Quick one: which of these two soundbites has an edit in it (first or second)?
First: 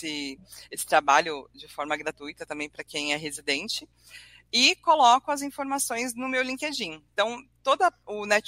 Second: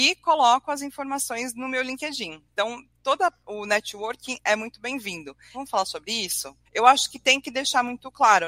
second